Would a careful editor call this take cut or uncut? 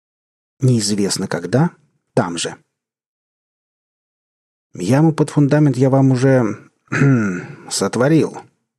uncut